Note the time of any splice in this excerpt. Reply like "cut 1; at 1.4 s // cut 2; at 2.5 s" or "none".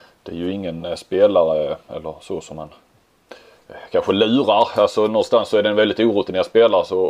none